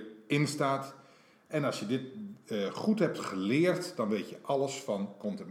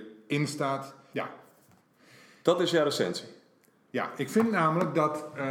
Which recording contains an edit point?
second; 2 cuts; at 1.1 s, 3.7 s

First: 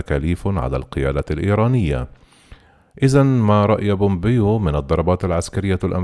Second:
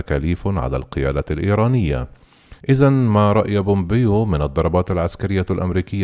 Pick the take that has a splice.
second; 1 cut; at 2.6 s

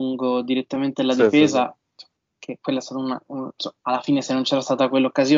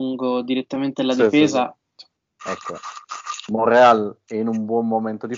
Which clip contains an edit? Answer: second; 1 cut; at 2.4 s

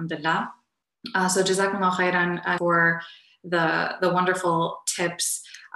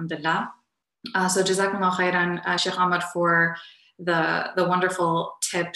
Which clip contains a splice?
first; 1 cut; at 2.6 s

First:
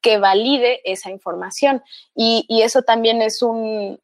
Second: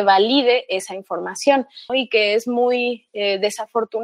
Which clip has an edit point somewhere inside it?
second; 1 cut; at 1.9 s

